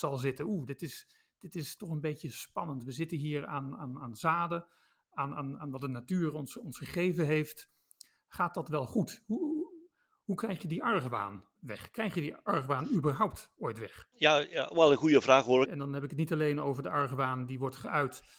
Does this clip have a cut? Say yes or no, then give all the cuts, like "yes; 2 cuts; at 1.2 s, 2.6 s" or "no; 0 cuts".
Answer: yes; 3 cuts; at 11.6 s, 14.1 s, 15.6 s